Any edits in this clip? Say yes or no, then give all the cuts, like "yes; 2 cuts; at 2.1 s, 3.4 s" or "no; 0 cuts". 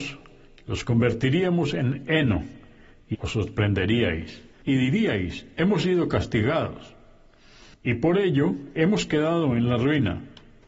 yes; 2 cuts; at 3.1 s, 4.5 s